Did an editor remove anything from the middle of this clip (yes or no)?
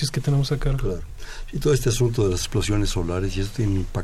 no